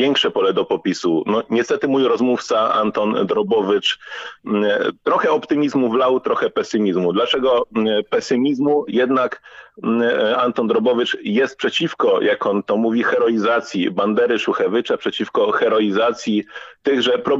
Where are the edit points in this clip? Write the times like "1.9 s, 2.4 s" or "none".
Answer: 8.9 s